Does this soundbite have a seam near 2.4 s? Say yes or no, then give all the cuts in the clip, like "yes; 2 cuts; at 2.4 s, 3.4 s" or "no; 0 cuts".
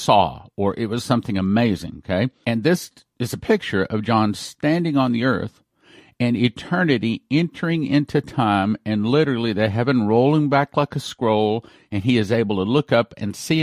yes; 1 cut; at 2.4 s